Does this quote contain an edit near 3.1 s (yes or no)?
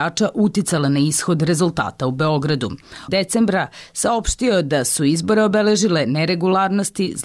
yes